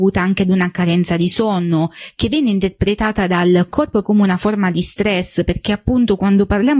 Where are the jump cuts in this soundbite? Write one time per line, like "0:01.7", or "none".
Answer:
0:04.0

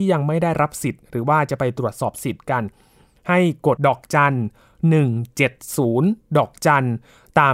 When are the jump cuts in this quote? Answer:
0:03.8

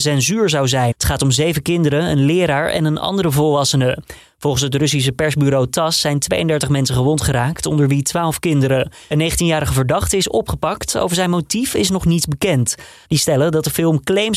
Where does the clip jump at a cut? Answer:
0:00.9
0:13.0

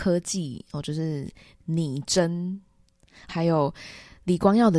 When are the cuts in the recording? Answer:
0:03.3

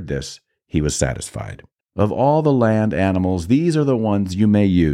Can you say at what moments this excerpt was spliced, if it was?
0:01.8

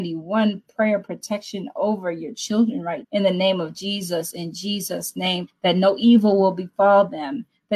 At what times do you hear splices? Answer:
0:03.0
0:05.5

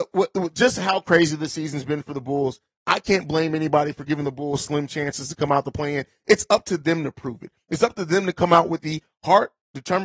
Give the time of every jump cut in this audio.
none

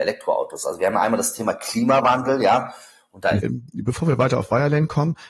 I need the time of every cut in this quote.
0:03.4

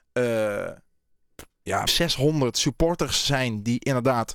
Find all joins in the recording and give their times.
0:01.9

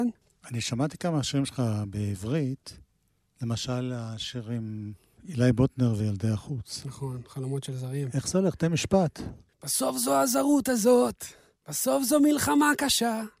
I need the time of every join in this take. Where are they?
none

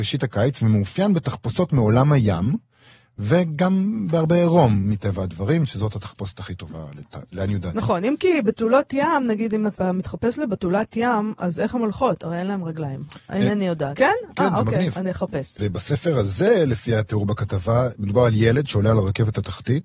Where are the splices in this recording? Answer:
0:14.0
0:15.6

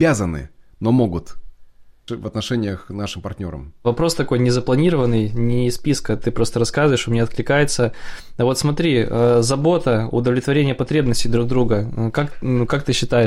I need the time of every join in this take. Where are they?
0:02.1

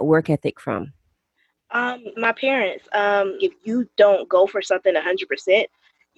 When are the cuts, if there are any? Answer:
0:02.1
0:03.4

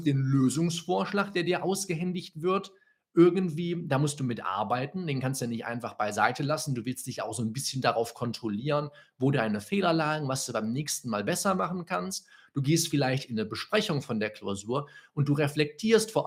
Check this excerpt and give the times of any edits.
none

